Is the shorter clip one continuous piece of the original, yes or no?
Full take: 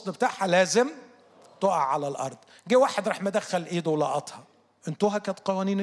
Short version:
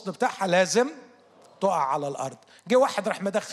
yes